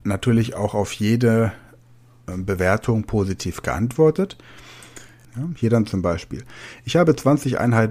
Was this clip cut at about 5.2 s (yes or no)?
yes